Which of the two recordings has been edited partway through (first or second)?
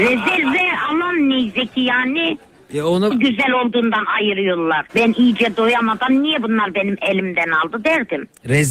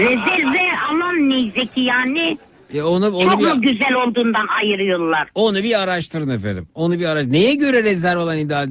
first